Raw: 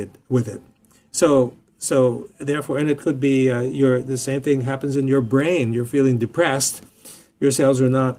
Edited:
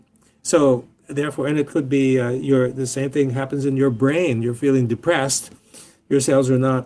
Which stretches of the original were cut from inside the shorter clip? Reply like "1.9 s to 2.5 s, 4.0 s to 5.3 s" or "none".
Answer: 1.7 s to 2.3 s